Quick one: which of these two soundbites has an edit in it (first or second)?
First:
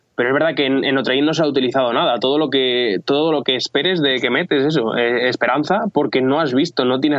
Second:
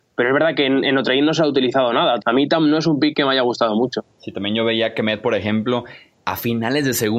second